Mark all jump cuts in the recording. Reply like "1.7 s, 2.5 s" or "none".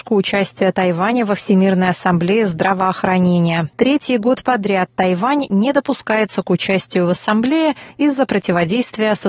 3.7 s